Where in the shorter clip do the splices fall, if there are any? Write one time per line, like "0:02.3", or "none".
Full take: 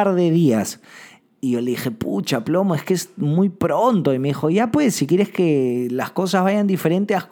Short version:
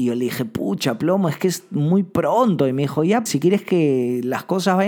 0:03.3